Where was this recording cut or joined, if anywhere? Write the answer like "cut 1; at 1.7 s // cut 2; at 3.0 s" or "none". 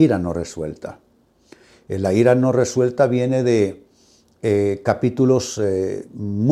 none